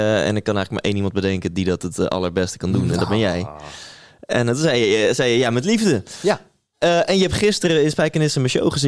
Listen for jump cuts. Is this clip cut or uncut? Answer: uncut